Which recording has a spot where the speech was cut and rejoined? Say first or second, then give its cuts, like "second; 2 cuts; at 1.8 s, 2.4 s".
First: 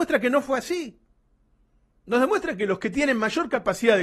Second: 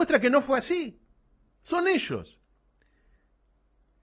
second; 1 cut; at 1.5 s